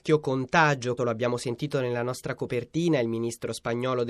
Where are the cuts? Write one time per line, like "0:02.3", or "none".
0:01.0